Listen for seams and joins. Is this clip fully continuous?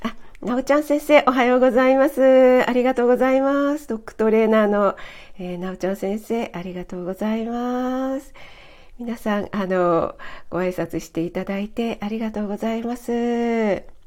yes; 0 cuts

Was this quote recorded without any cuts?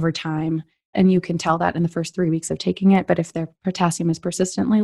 no; 1 cut; at 0.9 s

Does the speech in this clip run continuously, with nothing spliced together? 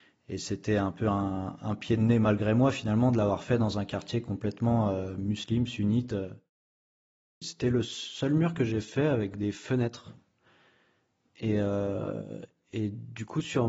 no; 1 cut; at 7.4 s

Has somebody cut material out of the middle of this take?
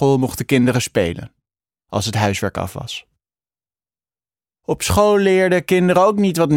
no; 0 cuts

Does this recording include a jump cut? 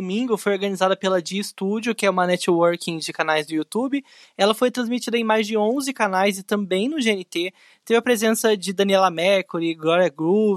no; 0 cuts

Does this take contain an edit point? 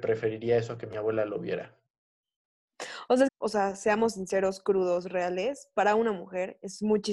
yes; 1 cut; at 3.3 s

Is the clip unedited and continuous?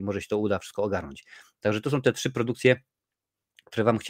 yes; 0 cuts

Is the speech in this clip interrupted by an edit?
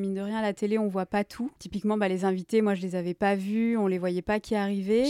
no; 0 cuts

